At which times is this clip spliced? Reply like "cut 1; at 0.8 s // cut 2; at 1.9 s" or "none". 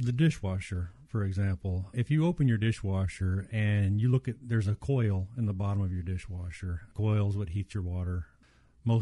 cut 1; at 1.9 s